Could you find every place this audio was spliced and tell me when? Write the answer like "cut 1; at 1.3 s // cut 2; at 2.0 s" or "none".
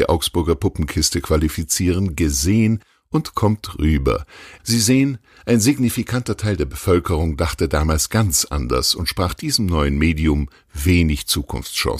cut 1; at 4.6 s